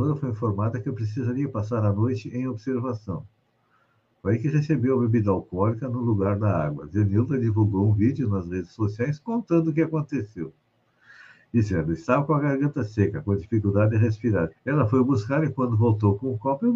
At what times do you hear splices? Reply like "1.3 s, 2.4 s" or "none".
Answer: 14.5 s